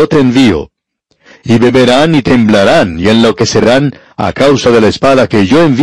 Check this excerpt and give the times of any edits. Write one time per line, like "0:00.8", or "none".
none